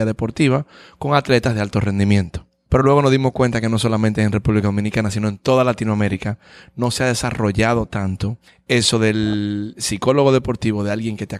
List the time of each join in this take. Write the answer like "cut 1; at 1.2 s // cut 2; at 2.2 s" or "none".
none